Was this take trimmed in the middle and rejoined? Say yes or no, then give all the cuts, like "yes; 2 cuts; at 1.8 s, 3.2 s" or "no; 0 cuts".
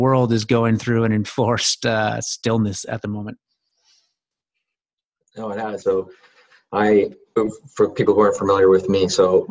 yes; 1 cut; at 5.8 s